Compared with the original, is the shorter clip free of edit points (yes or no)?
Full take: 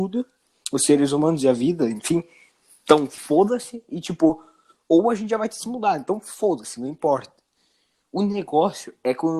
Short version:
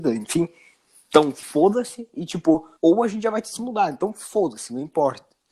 no